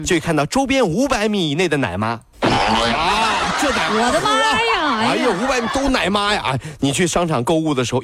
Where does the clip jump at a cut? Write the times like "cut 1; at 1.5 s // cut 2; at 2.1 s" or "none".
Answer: none

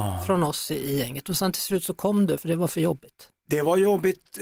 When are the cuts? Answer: cut 1; at 2.4 s

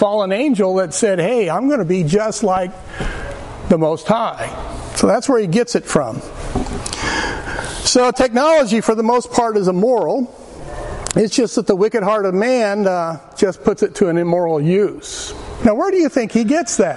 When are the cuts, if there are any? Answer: cut 1; at 15.6 s

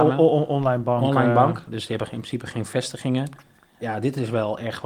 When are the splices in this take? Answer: cut 1; at 3.8 s

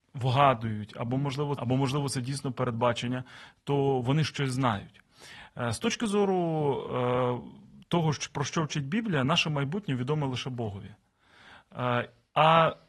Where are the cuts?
cut 1; at 1.6 s

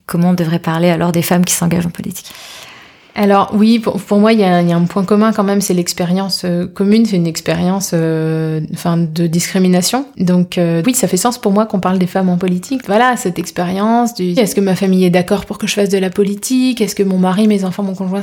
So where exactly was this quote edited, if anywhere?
cut 1; at 10.8 s // cut 2; at 12.8 s // cut 3; at 14.4 s

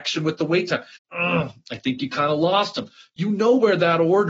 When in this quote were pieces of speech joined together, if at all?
cut 1; at 1.0 s

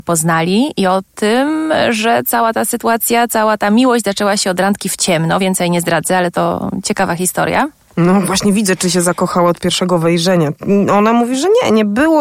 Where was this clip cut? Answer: none

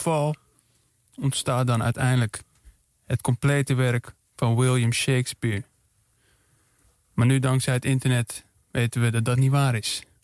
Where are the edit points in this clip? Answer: none

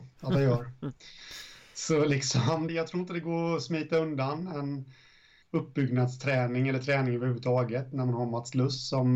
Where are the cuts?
cut 1; at 2.7 s // cut 2; at 5.4 s

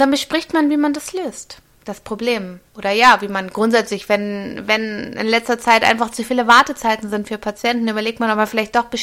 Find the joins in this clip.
cut 1; at 2.7 s

